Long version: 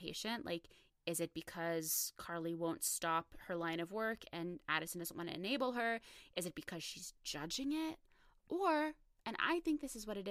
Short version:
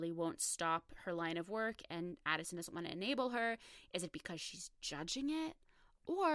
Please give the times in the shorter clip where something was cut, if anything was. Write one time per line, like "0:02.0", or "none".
none